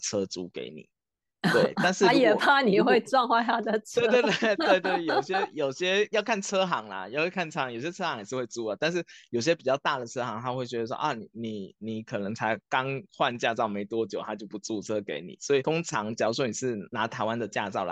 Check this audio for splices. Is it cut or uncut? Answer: uncut